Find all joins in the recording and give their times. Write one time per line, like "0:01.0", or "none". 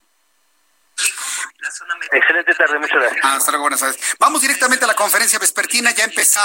0:01.5